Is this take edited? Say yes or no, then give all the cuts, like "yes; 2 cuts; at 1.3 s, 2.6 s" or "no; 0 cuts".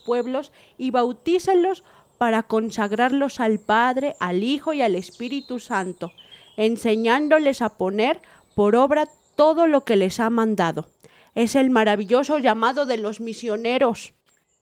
no; 0 cuts